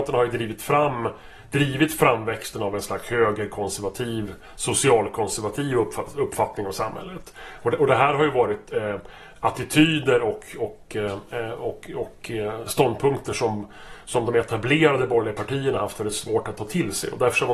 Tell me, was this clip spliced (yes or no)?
no